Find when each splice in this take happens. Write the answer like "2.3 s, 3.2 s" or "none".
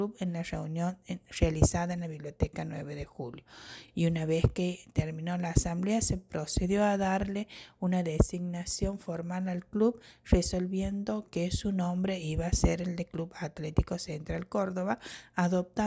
none